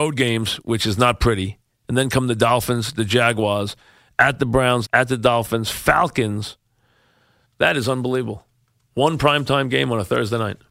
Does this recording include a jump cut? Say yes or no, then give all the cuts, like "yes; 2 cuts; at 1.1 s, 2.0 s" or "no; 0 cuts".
yes; 2 cuts; at 4.8 s, 7.4 s